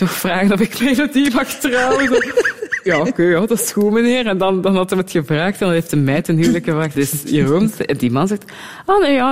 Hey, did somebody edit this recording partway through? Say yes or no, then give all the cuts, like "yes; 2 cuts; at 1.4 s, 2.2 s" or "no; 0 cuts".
yes; 1 cut; at 6.9 s